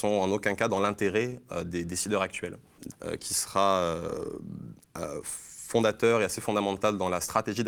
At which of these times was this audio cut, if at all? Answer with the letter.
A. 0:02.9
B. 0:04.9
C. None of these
A